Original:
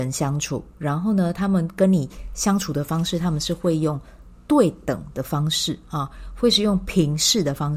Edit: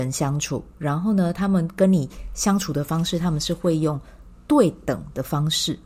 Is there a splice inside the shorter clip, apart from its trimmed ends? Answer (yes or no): no